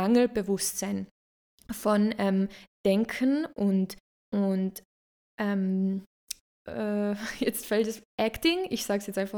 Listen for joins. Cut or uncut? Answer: uncut